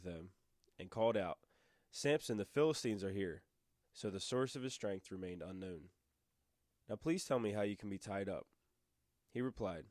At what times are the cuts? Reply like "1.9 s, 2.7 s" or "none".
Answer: 3.8 s, 6.8 s